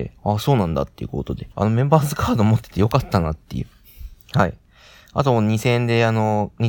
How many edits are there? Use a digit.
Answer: 1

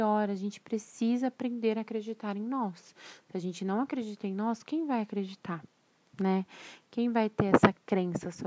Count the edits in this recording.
0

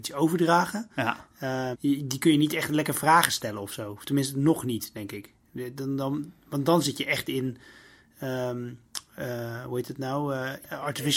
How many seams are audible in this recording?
1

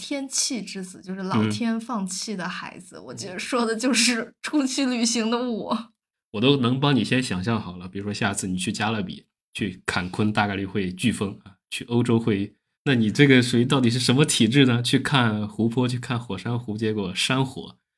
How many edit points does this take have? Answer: 2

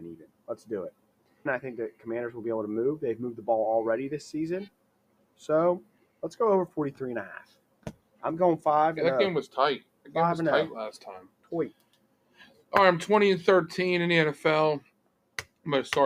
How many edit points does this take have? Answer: 1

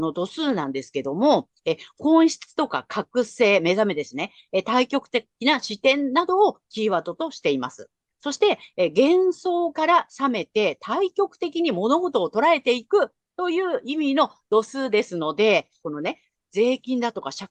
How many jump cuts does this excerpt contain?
1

